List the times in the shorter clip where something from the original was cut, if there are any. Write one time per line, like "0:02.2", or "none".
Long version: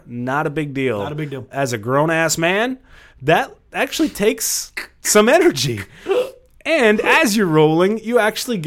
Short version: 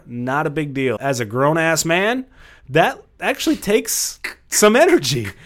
0:01.0